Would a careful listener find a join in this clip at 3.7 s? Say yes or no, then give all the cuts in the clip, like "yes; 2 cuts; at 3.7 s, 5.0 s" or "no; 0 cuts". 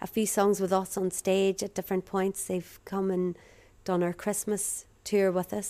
no; 0 cuts